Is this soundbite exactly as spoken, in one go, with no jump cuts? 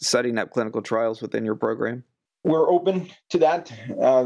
yes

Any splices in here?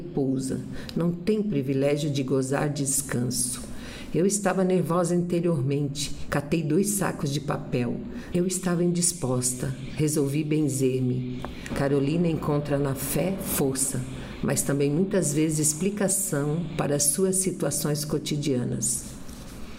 yes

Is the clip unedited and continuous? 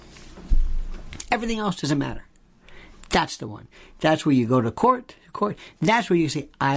yes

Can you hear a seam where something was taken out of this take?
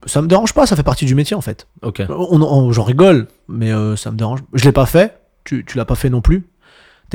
yes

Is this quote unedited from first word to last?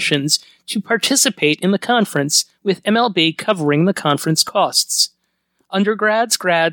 yes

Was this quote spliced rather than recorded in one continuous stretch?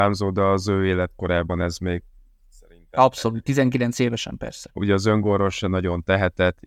yes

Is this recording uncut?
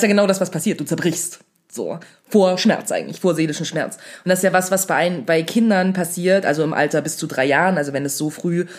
yes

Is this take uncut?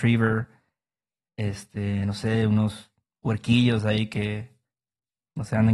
yes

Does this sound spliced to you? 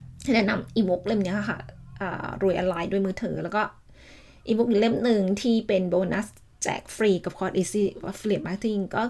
no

